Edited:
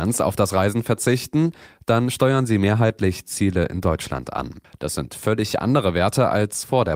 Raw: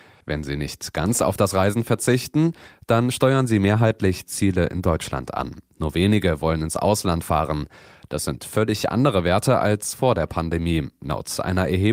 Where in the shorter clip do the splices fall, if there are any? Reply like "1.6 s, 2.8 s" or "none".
4.6 s

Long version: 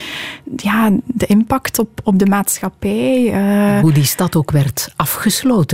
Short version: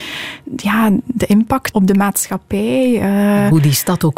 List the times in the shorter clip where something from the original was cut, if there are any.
1.7 s

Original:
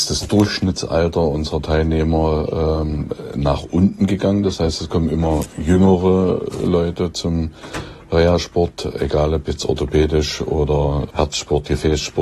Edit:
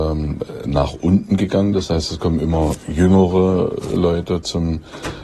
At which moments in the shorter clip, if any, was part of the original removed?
none

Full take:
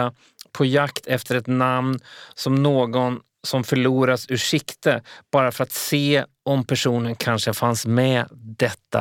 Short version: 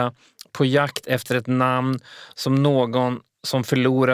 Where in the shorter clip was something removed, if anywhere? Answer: none

